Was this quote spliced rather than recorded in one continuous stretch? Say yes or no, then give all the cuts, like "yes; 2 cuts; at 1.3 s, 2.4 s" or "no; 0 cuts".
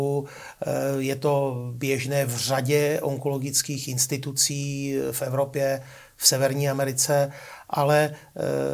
no; 0 cuts